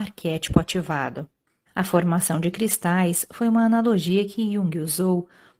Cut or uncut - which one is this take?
cut